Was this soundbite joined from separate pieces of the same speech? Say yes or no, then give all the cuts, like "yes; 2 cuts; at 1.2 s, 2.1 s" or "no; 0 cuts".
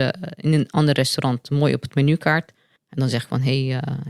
yes; 1 cut; at 2.8 s